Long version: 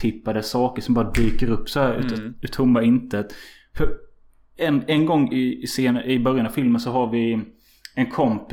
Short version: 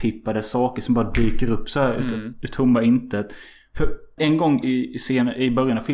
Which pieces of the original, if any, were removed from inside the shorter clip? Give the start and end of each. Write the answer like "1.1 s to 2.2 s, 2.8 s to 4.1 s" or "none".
4.2 s to 4.9 s